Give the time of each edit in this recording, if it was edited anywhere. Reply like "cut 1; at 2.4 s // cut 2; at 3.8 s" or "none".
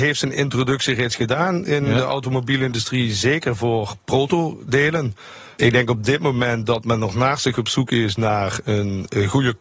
none